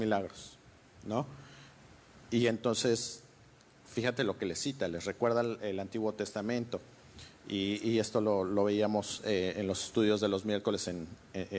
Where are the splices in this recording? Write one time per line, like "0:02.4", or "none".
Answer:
none